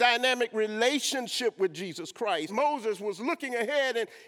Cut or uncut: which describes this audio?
cut